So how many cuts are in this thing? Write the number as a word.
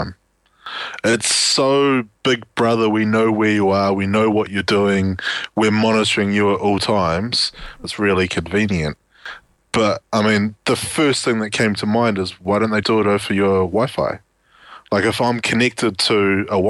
two